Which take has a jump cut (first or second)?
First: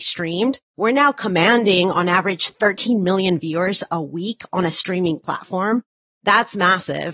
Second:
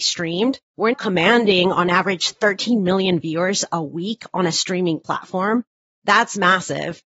second